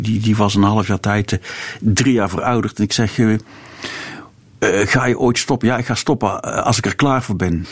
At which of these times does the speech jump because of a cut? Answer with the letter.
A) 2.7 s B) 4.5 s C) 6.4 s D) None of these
D